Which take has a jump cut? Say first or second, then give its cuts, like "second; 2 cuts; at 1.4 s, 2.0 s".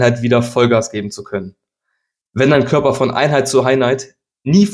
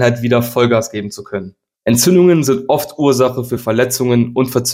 second; 1 cut; at 1.7 s